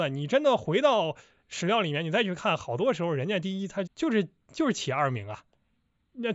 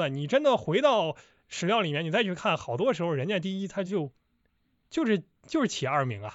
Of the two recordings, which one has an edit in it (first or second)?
first